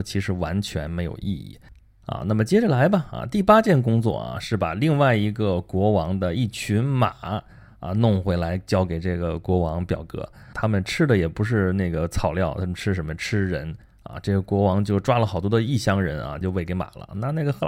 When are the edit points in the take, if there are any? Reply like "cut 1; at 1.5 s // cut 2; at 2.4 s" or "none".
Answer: cut 1; at 10.5 s // cut 2; at 16.4 s